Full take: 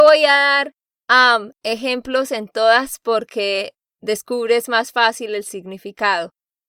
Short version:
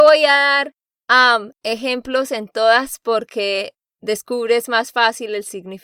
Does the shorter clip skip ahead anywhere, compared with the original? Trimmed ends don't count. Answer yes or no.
no